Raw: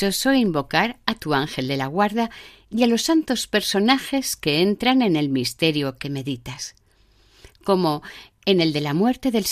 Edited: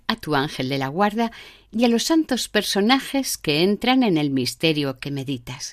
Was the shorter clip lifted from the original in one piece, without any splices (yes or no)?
yes